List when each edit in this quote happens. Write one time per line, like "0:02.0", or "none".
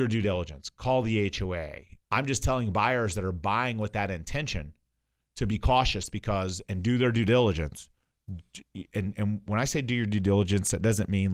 0:02.0